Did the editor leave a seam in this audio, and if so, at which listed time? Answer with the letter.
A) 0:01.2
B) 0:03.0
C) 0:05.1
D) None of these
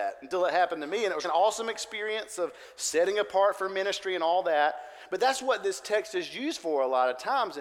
A